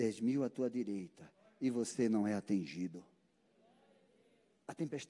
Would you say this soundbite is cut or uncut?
uncut